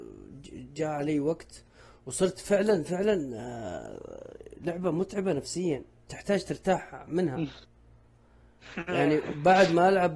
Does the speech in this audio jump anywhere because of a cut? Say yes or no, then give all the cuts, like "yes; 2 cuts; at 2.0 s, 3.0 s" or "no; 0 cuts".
no; 0 cuts